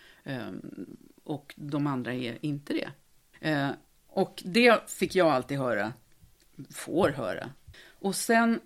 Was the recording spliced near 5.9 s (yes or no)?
no